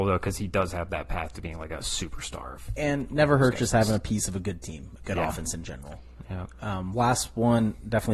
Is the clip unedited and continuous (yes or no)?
yes